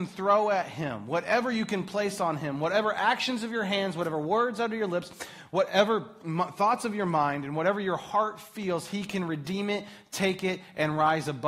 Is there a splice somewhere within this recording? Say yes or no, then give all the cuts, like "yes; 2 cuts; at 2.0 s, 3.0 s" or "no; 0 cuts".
no; 0 cuts